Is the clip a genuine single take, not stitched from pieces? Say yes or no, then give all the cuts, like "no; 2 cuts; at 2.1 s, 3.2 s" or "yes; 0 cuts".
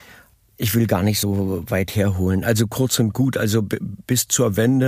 yes; 0 cuts